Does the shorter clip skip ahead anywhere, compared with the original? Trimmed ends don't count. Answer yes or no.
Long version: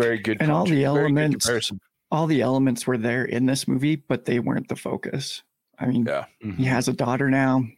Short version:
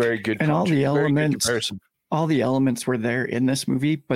no